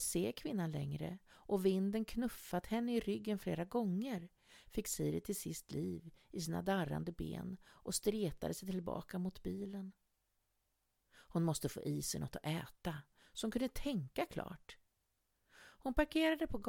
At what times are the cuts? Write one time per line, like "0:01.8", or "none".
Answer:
0:11.0